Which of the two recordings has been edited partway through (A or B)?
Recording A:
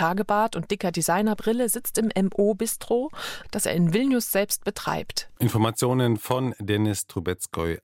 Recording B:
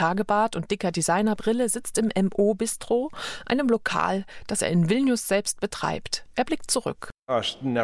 A